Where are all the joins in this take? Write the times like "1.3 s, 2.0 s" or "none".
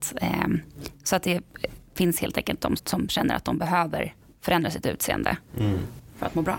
2.8 s

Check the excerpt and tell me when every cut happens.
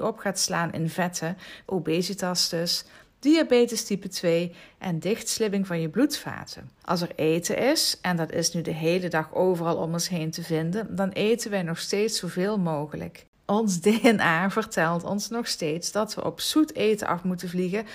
1.7 s, 6.8 s

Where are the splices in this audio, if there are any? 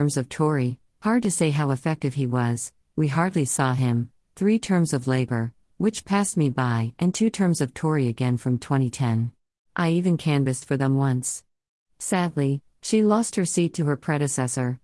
9.6 s, 11.9 s

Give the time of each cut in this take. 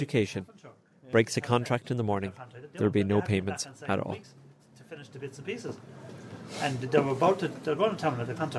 none

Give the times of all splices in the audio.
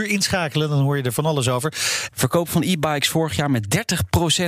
2.1 s

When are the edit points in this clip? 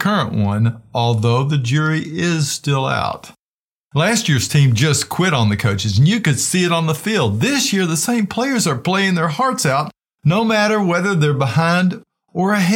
none

